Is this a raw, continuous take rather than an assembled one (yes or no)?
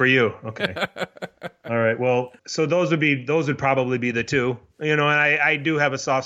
no